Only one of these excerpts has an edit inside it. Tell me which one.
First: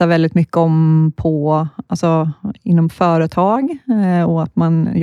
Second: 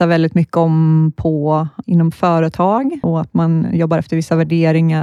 second; 2 cuts; at 1.8 s, 3.0 s

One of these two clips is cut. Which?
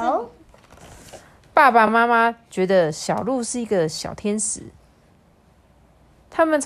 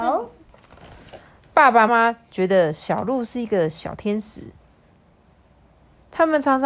second; 1 cut; at 1.9 s

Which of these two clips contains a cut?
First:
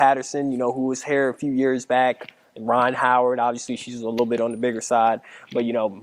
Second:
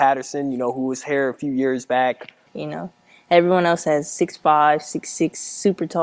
second; 1 cut; at 2.5 s

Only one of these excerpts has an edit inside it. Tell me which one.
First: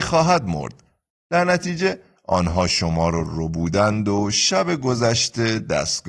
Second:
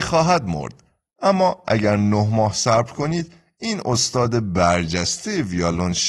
first; 1 cut; at 1.1 s

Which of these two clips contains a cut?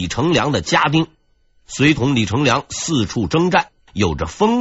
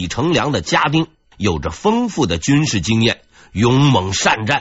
second; 1 cut; at 1.2 s

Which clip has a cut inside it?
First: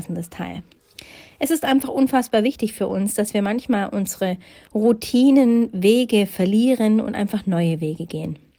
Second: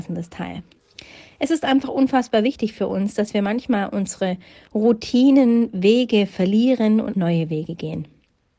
second; 1 cut; at 7.1 s

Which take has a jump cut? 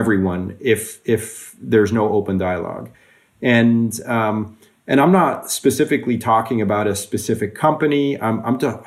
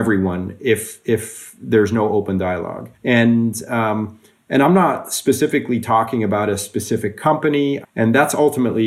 second; 2 cuts; at 2.9 s, 7.8 s

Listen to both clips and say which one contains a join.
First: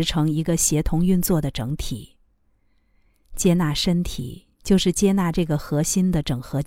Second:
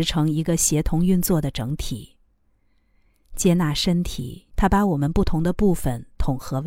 second; 1 cut; at 4.5 s

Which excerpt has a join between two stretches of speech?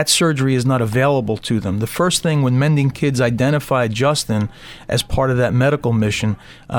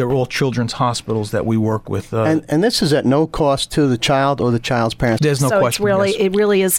second; 1 cut; at 5.2 s

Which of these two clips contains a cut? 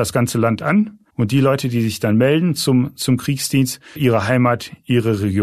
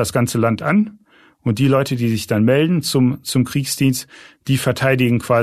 first; 2 cuts; at 1.1 s, 4.0 s

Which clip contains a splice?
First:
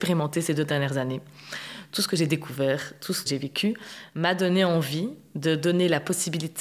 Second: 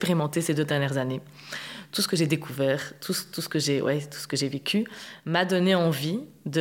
first; 1 cut; at 3.3 s

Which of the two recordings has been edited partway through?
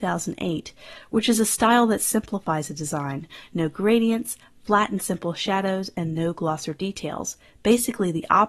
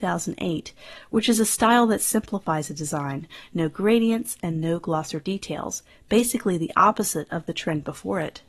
second; 1 cut; at 4.4 s

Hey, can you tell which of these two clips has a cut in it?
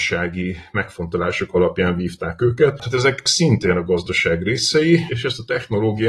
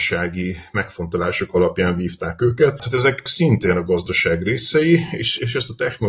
first; 1 cut; at 5.1 s

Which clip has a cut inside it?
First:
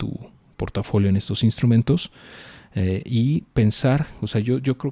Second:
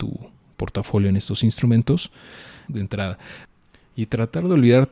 second; 1 cut; at 2.7 s

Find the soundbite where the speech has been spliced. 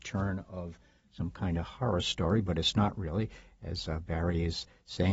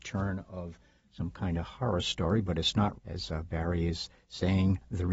second; 1 cut; at 2.9 s

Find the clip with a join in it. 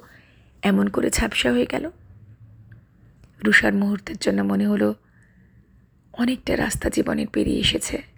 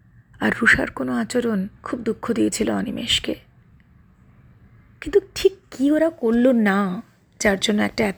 second; 1 cut; at 1.8 s

